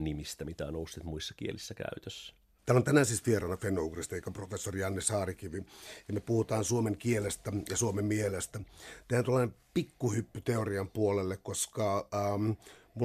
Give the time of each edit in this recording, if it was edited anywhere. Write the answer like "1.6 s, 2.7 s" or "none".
none